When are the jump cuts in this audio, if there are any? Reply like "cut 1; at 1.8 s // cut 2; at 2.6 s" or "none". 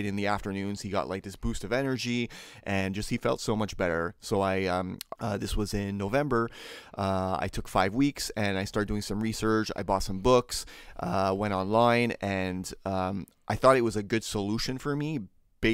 cut 1; at 5.2 s